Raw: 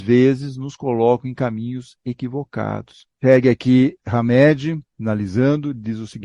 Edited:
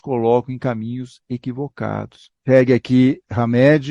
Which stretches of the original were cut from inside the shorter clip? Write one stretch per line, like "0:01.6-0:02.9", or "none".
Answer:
none